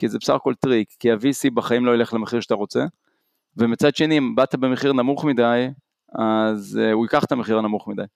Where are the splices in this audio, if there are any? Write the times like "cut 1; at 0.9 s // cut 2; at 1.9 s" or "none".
none

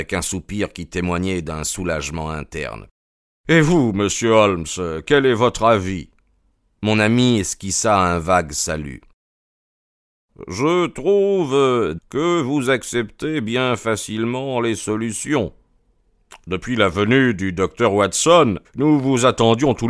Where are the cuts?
cut 1; at 12.0 s // cut 2; at 18.6 s

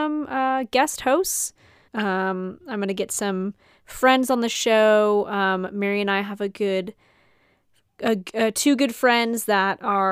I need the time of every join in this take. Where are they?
cut 1; at 1.9 s

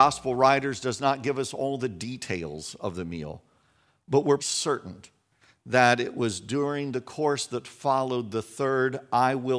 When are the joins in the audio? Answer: cut 1; at 4.4 s

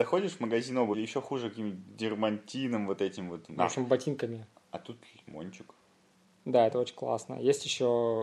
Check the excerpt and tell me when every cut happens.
cut 1; at 0.9 s

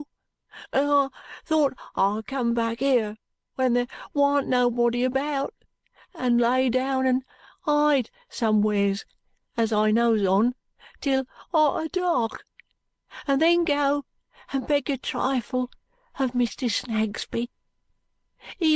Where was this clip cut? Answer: none

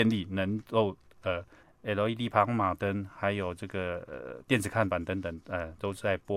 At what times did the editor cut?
cut 1; at 1.6 s

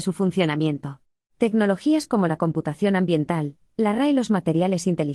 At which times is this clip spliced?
cut 1; at 1.2 s // cut 2; at 3.7 s

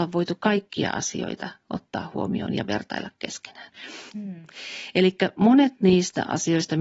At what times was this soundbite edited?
cut 1; at 4.1 s

